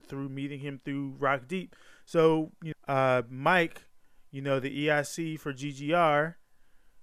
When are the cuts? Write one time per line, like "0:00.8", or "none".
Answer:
0:02.7